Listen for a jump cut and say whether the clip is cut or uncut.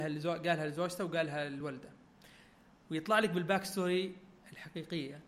uncut